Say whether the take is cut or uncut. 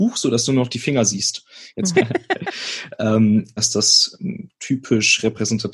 cut